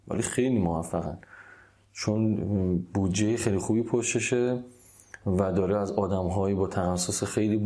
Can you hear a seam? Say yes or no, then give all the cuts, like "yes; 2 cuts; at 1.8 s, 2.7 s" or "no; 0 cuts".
no; 0 cuts